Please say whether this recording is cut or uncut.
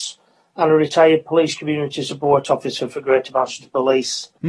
uncut